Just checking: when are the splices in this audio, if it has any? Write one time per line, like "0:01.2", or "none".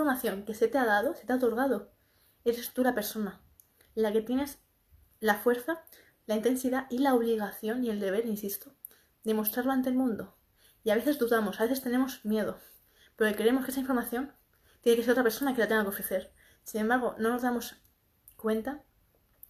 none